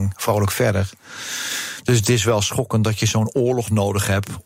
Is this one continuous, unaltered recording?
yes; 0 cuts

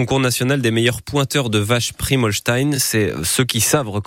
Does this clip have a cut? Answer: no; 0 cuts

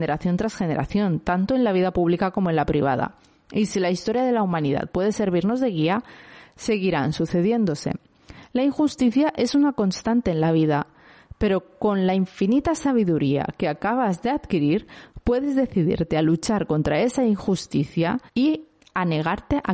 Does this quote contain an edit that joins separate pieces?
yes; 1 cut; at 18.3 s

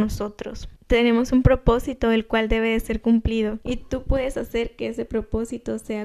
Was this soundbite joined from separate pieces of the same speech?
no; 0 cuts

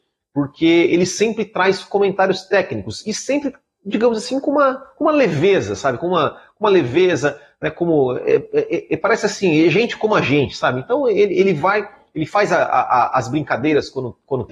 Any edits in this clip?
no; 0 cuts

